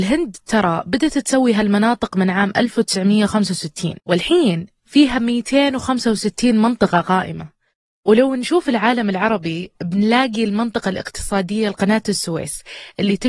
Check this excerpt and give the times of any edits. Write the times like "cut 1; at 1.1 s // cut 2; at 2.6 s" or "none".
cut 1; at 4.0 s